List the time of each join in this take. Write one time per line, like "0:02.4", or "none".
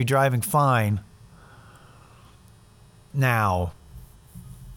0:03.1